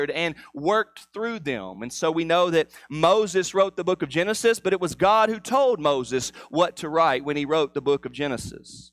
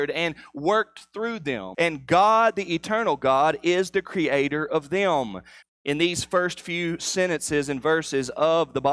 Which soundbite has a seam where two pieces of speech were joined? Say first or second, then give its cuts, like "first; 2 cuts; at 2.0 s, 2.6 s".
second; 2 cuts; at 1.7 s, 5.6 s